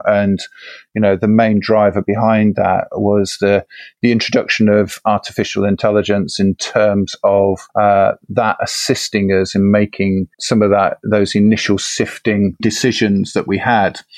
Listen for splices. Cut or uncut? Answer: cut